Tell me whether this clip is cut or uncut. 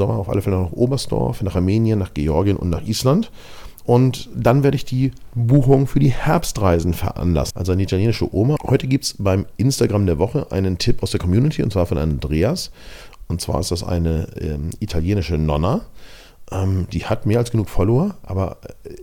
cut